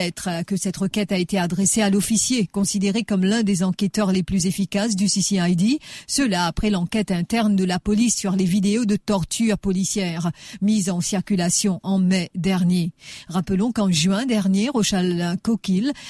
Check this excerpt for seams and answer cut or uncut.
uncut